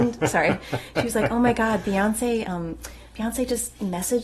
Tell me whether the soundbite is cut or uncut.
uncut